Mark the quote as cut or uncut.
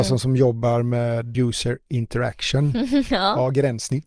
cut